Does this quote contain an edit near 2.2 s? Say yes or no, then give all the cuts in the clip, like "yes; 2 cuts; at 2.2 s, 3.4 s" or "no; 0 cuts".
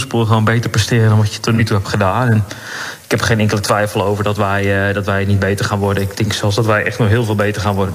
no; 1 cut; at 6.1 s